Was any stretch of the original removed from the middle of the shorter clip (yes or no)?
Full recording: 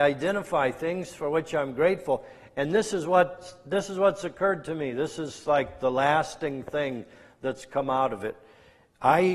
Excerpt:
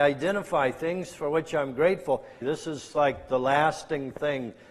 yes